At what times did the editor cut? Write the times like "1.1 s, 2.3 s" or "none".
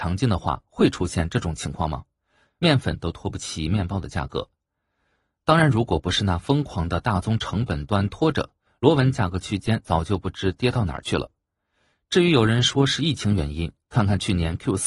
2.5 s